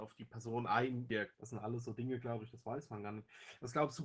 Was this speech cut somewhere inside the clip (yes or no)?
yes